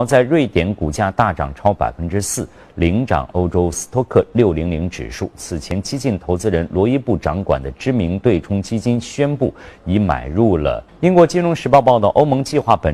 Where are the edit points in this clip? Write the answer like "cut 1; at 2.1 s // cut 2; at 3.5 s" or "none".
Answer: cut 1; at 10.9 s